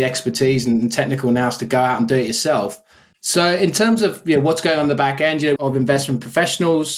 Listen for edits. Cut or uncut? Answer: cut